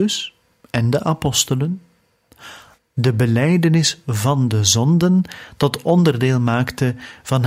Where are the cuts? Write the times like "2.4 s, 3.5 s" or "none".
2.8 s